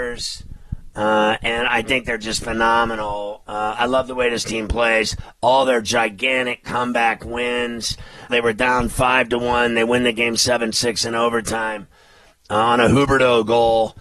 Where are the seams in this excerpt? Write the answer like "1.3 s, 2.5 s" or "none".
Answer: 8.3 s